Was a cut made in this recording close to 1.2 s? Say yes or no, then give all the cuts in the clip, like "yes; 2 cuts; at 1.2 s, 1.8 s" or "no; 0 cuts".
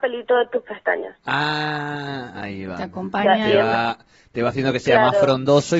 yes; 1 cut; at 1.2 s